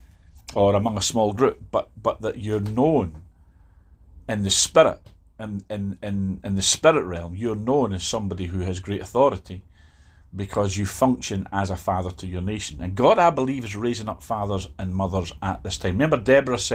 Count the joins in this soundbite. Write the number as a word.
zero